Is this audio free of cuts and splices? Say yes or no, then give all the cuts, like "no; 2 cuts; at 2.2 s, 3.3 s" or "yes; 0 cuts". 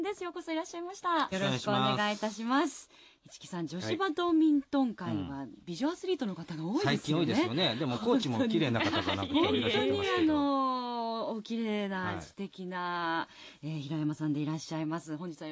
no; 1 cut; at 1.3 s